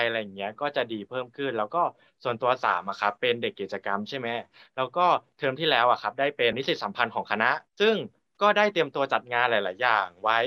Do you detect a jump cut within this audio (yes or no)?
yes